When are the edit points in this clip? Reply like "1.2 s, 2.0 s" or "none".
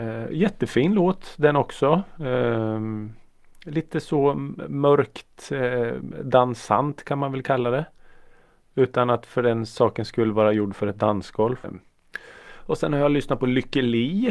11.6 s